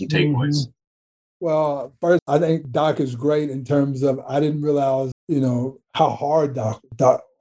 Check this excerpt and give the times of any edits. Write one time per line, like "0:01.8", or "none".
0:02.2
0:05.1